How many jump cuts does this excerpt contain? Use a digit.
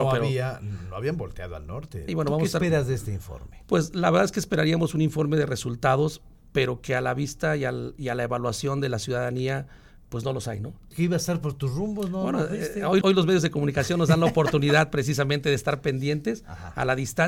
3